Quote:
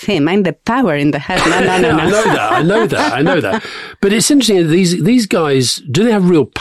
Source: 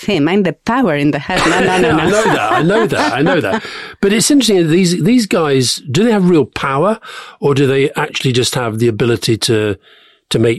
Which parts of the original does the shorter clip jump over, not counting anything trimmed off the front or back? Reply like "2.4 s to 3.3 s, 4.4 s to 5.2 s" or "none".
none